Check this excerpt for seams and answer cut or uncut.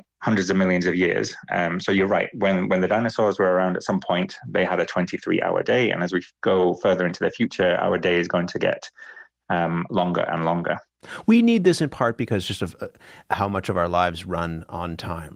uncut